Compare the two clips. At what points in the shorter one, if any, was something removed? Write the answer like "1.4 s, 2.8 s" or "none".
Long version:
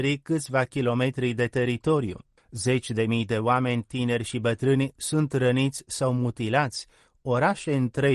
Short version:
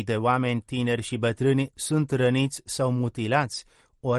none